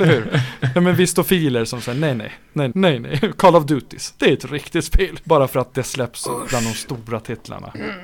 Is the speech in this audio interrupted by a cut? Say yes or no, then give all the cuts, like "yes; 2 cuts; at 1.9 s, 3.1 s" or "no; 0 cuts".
yes; 2 cuts; at 2.7 s, 5.2 s